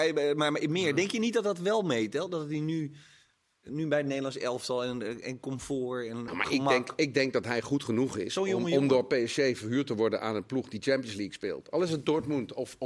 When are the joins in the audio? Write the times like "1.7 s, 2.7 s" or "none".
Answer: 6.3 s